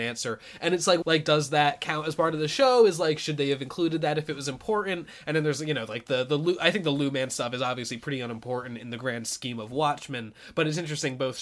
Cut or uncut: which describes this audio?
cut